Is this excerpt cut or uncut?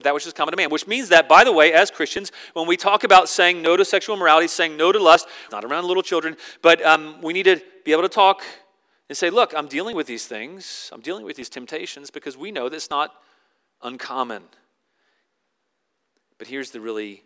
cut